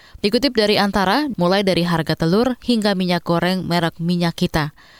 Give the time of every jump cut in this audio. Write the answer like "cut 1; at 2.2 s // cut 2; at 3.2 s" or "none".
cut 1; at 1.3 s

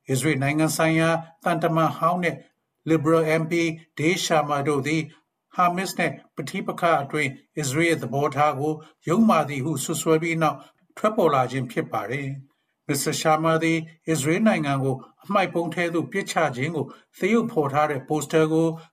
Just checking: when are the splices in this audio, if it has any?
none

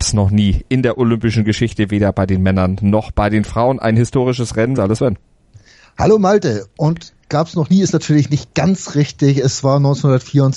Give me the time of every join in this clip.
cut 1; at 4.8 s

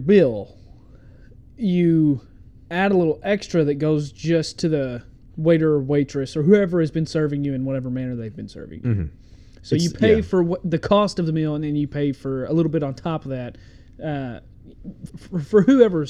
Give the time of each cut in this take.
cut 1; at 15.1 s

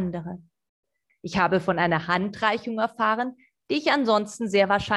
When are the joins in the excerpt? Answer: cut 1; at 1.1 s

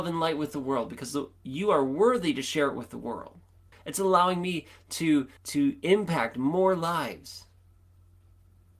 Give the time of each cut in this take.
cut 1; at 3.7 s // cut 2; at 5.4 s

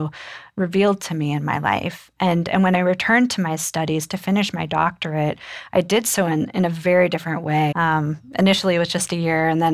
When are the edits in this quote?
cut 1; at 7.7 s

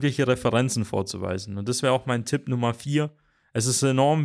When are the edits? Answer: none

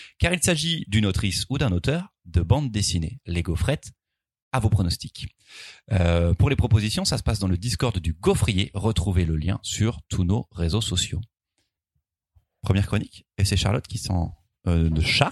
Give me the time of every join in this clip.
none

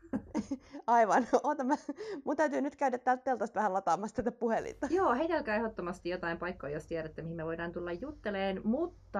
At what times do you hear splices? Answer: none

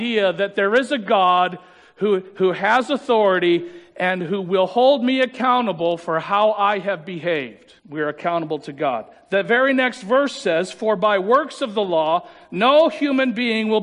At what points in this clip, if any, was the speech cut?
cut 1; at 7.8 s

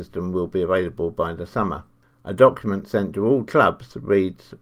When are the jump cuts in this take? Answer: none

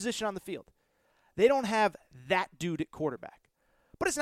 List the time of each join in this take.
none

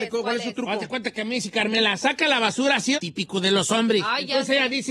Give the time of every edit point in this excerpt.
cut 1; at 2.9 s

